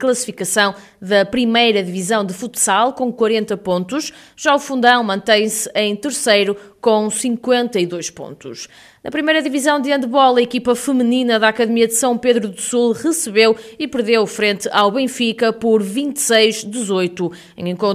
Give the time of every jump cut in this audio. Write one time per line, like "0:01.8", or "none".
none